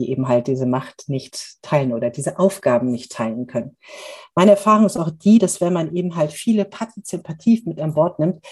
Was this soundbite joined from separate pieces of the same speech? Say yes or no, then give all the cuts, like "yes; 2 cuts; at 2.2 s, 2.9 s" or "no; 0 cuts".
no; 0 cuts